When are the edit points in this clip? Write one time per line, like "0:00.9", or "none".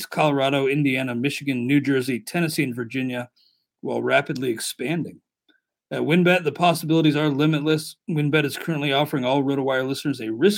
none